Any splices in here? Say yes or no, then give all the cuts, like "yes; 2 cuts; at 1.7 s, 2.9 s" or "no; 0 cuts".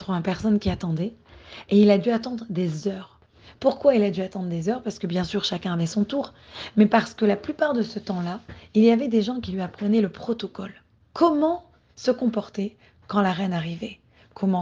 no; 0 cuts